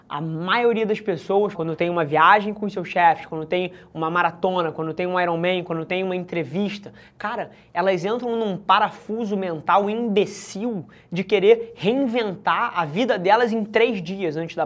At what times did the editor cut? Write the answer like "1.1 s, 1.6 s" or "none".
1.5 s

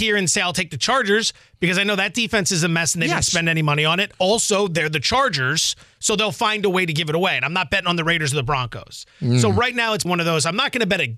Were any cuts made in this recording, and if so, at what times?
10.1 s

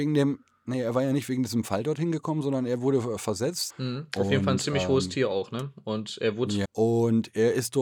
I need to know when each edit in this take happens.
3.7 s, 6.6 s

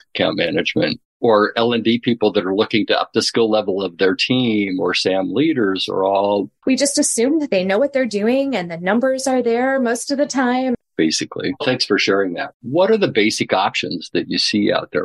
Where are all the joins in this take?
6.6 s, 10.7 s, 12.5 s

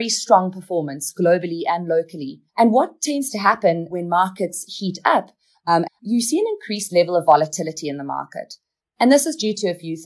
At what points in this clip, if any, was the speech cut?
2.5 s, 5.9 s

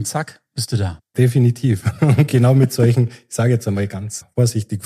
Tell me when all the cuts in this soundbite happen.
none

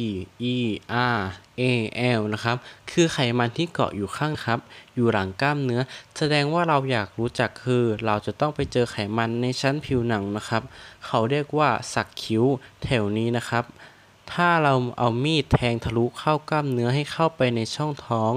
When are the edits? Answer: 4.3 s

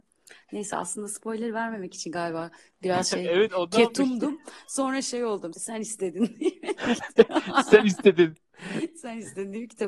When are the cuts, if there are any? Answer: 5.5 s

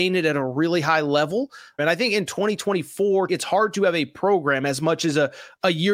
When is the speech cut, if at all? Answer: 1.8 s, 3.3 s

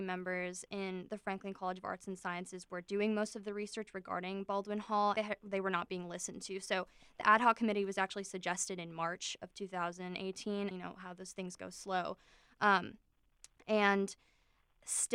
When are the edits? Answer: 5.2 s, 10.7 s

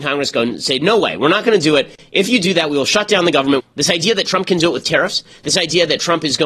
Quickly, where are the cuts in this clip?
3.6 s

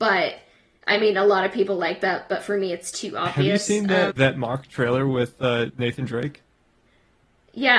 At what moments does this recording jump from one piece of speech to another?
4.1 s, 5.7 s

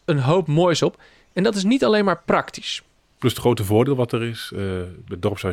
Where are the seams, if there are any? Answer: none

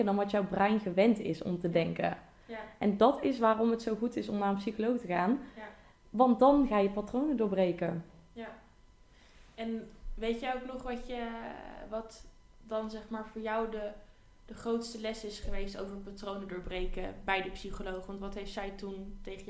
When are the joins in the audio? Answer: none

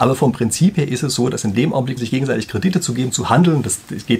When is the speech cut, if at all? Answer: 2.0 s

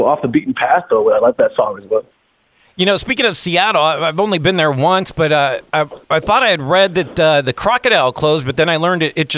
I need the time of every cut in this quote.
none

